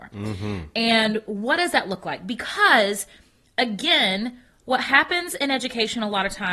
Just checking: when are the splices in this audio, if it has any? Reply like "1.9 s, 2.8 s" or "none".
none